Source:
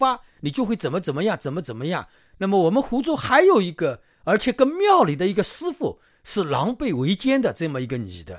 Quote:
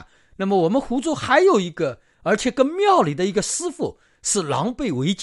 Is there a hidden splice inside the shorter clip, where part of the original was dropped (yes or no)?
no